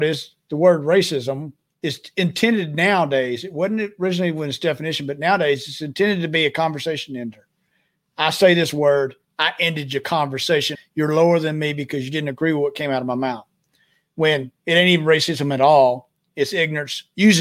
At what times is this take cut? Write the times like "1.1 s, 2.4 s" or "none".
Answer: 1.7 s, 10.8 s